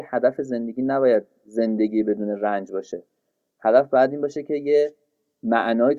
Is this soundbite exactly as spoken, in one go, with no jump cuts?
yes; 0 cuts

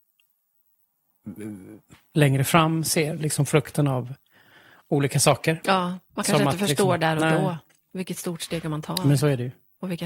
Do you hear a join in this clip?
no; 0 cuts

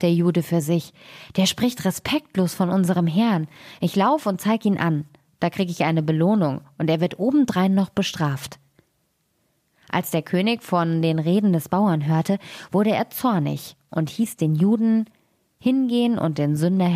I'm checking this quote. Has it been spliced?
no; 0 cuts

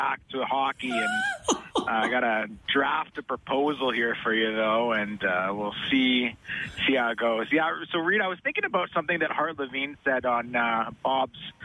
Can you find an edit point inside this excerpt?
no; 0 cuts

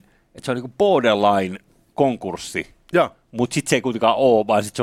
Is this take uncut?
yes; 0 cuts

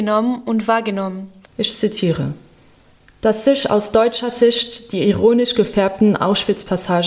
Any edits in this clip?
yes; 1 cut; at 1.5 s

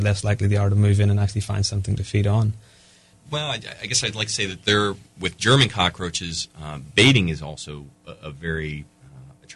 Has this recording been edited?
no; 0 cuts

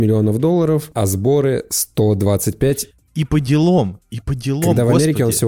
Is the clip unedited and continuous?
yes; 0 cuts

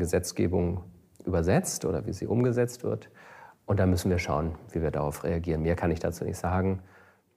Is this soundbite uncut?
yes; 0 cuts

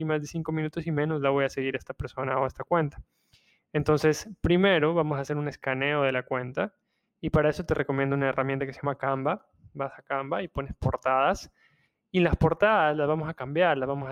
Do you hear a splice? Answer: no; 0 cuts

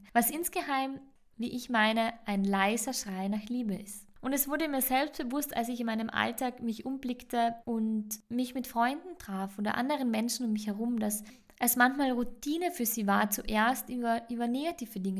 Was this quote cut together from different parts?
no; 0 cuts

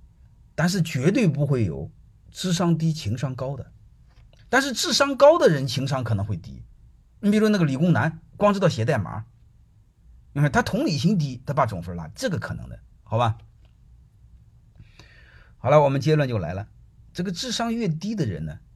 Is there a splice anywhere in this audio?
yes; 1 cut; at 4.4 s

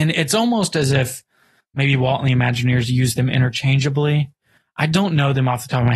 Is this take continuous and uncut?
yes; 0 cuts

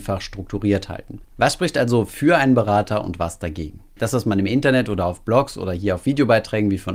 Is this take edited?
yes; 2 cuts; at 1.2 s, 4.0 s

